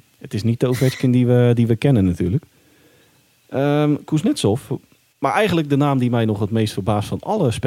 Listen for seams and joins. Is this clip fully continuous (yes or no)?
yes